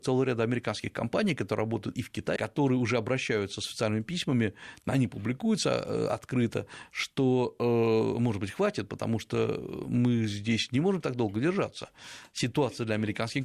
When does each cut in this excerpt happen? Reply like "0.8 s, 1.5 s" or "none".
2.4 s